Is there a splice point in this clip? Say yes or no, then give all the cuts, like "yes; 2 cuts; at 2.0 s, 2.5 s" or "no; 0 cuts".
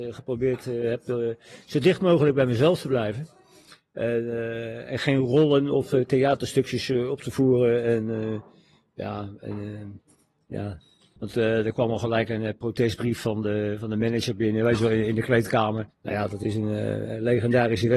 yes; 2 cuts; at 11.2 s, 15.9 s